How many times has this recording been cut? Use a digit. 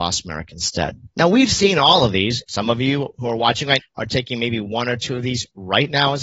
3